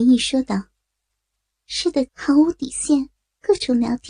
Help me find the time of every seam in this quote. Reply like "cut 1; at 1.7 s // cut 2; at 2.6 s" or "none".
cut 1; at 2.1 s